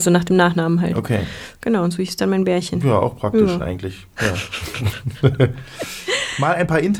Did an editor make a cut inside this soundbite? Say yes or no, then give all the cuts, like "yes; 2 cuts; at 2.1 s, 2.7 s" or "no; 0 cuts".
no; 0 cuts